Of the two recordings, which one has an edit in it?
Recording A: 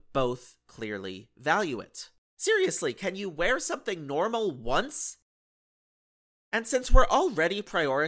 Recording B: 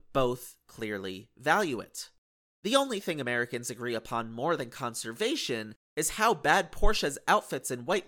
A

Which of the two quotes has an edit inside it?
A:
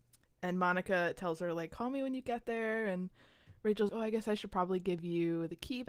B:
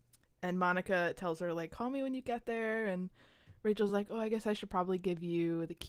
A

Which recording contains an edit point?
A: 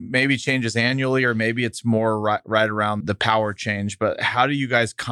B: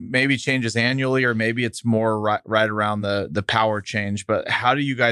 A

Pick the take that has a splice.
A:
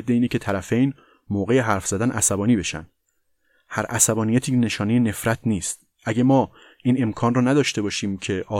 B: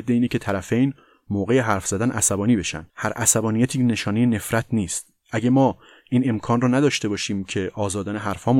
B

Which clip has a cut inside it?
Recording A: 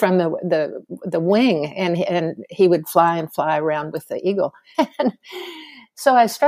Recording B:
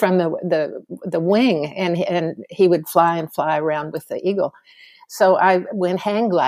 A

